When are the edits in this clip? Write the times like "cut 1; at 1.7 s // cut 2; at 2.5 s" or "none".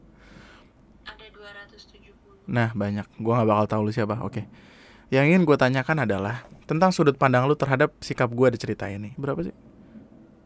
cut 1; at 9.2 s